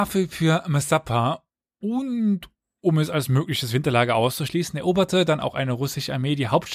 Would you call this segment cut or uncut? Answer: uncut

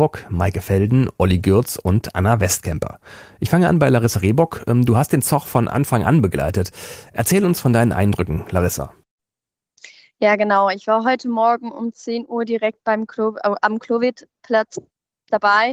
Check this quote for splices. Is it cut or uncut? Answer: uncut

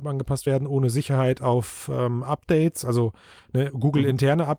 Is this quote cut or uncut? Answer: uncut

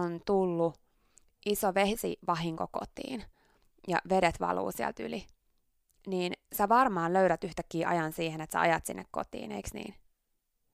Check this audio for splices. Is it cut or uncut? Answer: uncut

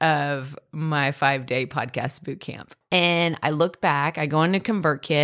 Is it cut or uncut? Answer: cut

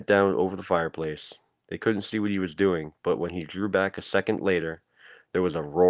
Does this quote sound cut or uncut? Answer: uncut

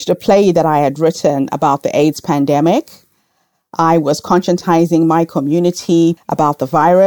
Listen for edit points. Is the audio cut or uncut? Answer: cut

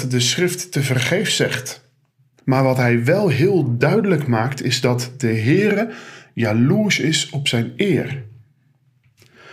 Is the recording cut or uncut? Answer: cut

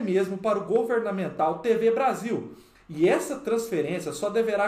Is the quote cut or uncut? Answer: cut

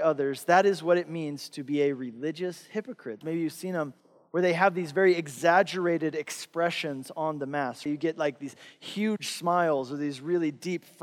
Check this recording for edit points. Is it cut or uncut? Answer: cut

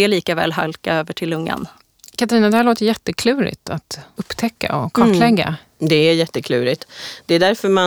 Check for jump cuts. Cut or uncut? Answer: uncut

